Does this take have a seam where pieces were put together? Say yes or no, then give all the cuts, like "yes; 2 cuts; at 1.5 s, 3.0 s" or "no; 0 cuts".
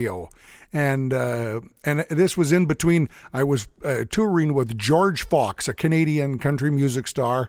no; 0 cuts